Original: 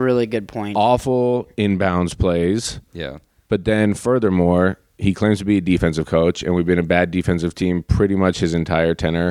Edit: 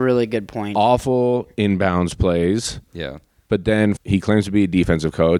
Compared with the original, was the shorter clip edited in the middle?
yes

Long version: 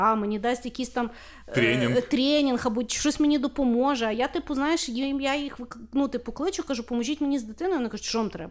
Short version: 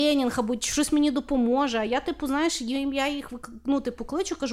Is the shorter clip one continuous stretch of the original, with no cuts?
yes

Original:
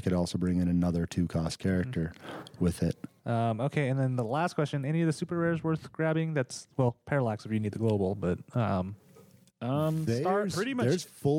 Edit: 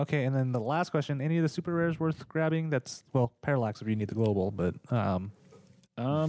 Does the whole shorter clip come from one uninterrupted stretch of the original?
yes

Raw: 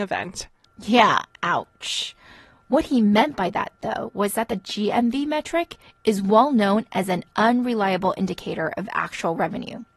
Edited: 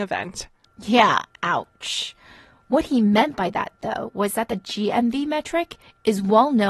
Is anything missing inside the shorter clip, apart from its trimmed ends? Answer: no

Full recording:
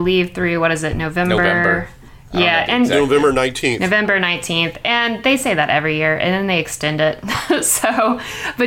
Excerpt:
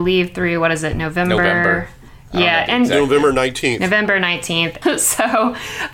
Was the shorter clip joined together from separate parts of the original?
yes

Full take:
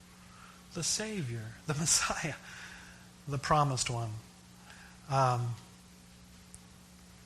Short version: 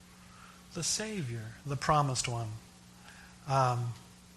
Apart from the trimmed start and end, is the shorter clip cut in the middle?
yes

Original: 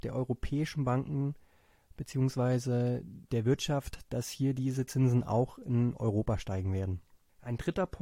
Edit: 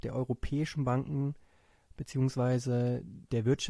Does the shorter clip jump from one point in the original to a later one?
no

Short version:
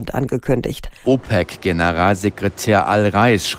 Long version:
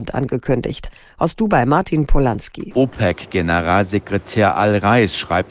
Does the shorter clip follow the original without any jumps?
no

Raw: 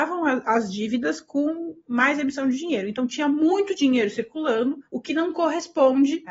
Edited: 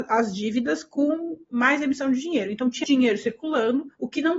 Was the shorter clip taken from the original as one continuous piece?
no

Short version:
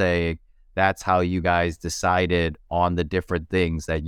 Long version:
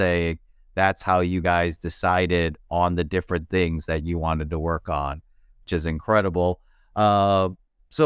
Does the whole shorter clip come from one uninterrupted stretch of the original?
yes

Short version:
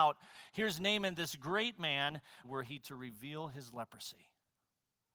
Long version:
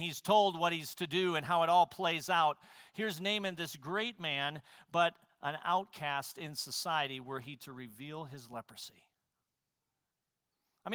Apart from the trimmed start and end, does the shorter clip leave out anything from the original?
yes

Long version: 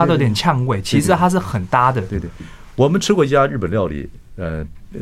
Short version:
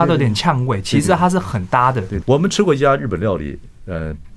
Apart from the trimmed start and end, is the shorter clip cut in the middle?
yes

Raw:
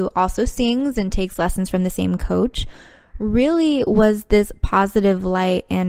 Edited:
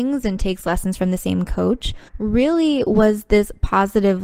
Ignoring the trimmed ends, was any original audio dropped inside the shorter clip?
yes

